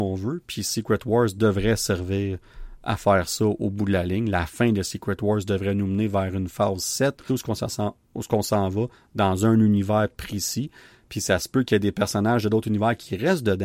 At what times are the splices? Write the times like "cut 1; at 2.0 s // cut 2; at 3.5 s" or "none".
cut 1; at 7.3 s